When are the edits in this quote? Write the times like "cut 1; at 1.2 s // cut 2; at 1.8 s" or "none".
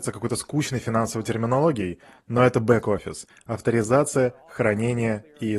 none